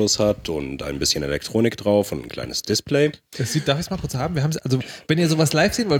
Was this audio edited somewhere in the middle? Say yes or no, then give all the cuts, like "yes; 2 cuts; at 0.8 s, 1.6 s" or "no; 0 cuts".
no; 0 cuts